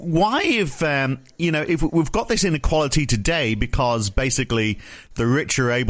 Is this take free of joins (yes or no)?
yes